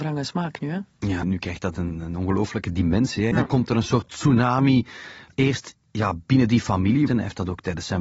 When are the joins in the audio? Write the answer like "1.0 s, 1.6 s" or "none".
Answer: 1.2 s, 3.3 s, 7.1 s

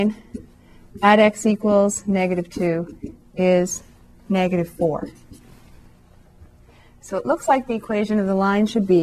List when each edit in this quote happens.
none

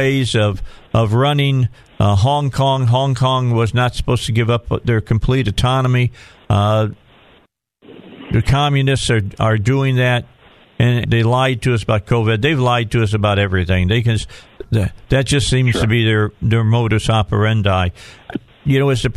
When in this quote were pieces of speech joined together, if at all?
11.0 s

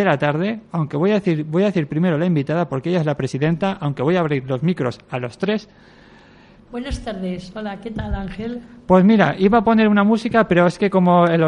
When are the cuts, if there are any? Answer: 6.7 s

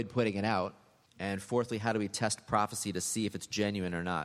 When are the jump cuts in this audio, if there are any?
1.1 s

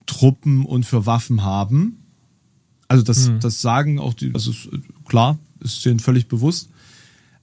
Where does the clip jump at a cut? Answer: 4.3 s

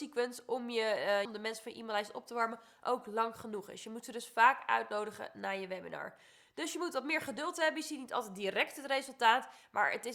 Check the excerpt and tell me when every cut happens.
1.2 s

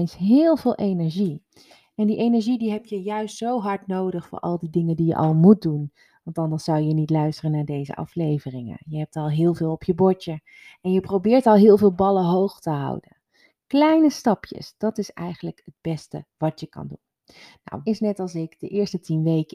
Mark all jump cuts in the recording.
17.8 s

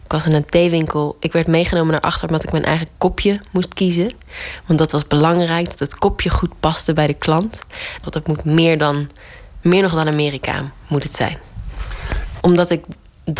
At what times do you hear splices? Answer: 8.0 s, 12.4 s

